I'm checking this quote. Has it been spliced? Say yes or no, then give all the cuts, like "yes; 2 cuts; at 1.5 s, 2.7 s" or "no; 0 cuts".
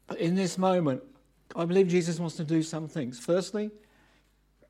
yes; 1 cut; at 1.5 s